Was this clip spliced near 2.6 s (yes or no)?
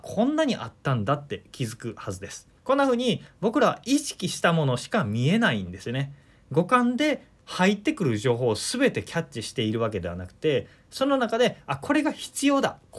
yes